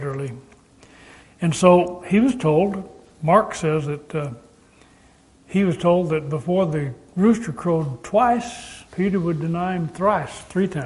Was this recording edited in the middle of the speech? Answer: yes; 2 cuts; at 1.2 s, 8.9 s

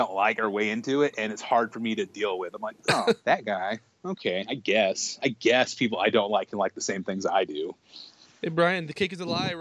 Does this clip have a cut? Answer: no; 0 cuts

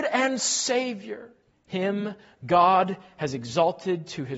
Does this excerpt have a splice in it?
yes; 1 cut; at 1.5 s

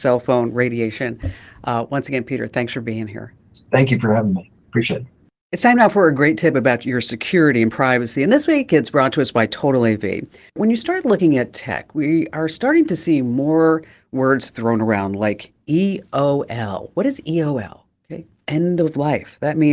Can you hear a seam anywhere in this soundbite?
no; 0 cuts

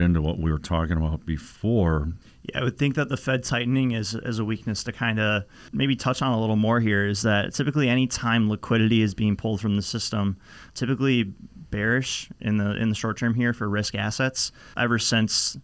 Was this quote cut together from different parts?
yes; 1 cut; at 2.2 s

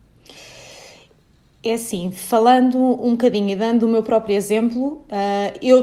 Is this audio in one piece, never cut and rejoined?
yes; 0 cuts

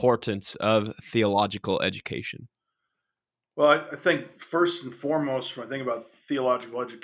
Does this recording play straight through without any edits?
yes; 0 cuts

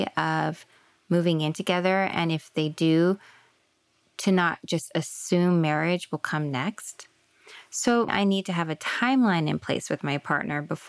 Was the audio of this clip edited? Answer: yes; 1 cut; at 8.1 s

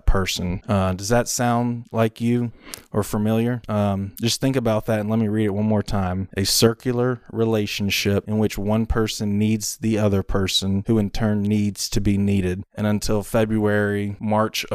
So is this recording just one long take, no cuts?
no; 1 cut; at 12.6 s

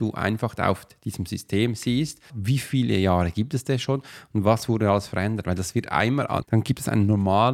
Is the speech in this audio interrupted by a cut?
yes; 2 cuts; at 2.3 s, 6.4 s

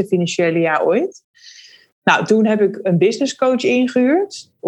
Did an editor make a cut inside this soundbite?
yes; 1 cut; at 1.9 s

